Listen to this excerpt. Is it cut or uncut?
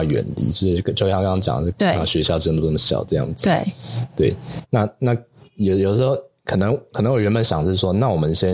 cut